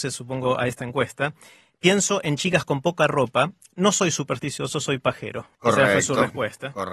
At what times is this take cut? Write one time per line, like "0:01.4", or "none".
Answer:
0:05.5

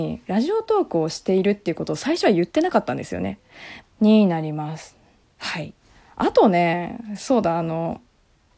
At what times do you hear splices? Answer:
0:03.8
0:05.2

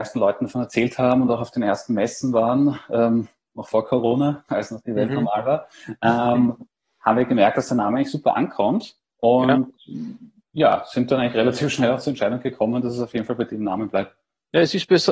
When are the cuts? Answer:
none

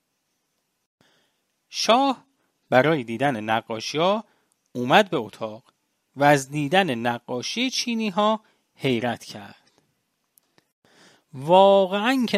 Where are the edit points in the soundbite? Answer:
none

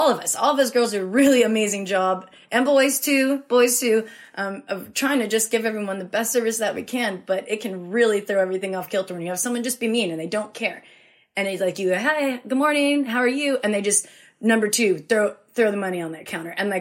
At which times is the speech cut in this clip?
none

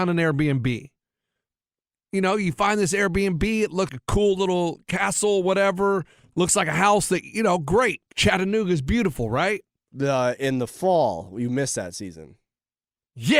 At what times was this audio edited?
0:03.9
0:08.1

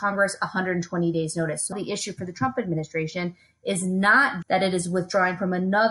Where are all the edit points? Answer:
0:01.7
0:04.4

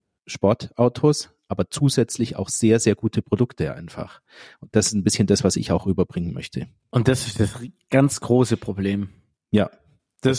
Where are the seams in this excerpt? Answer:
none

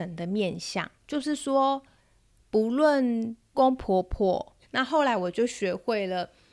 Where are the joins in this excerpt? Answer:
0:03.5
0:04.6

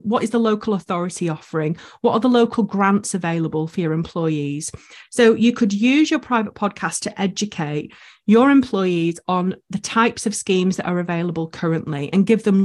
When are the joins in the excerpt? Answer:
none

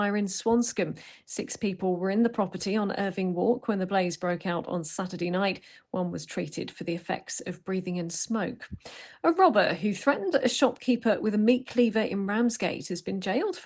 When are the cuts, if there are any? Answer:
none

